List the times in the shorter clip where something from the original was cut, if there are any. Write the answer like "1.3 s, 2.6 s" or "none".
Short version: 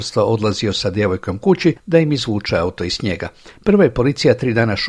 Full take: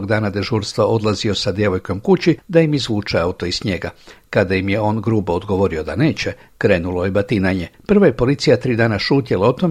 3.5 s